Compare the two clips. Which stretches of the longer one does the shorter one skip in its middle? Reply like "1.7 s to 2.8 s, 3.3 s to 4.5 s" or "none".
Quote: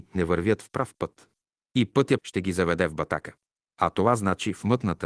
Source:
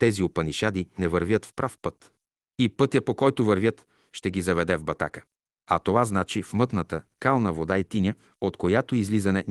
3.0 s to 4.1 s